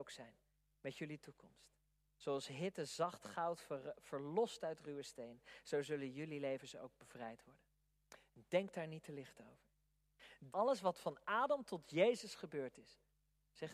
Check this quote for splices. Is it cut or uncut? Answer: cut